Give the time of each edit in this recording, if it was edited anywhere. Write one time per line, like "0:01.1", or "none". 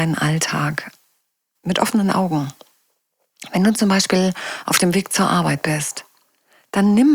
0:01.5